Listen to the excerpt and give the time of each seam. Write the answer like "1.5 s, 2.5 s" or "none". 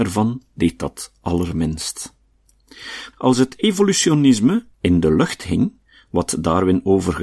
3.1 s, 4.7 s